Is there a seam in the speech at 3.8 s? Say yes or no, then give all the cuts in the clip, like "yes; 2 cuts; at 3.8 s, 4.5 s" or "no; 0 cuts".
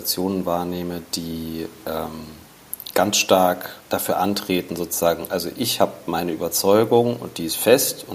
yes; 1 cut; at 3.8 s